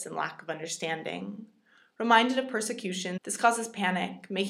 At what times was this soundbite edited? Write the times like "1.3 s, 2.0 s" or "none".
3.2 s